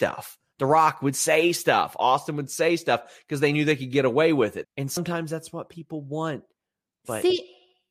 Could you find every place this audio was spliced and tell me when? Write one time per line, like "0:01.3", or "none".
0:04.6